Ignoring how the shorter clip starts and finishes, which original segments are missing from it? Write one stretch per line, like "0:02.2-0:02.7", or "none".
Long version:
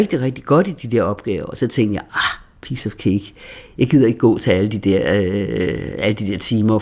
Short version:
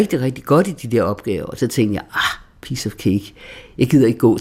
none